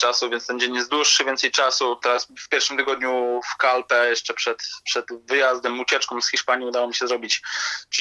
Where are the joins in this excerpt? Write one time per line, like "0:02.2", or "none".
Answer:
0:02.0